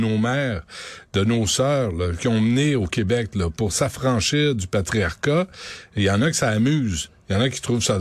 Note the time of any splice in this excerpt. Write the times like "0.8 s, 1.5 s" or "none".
2.2 s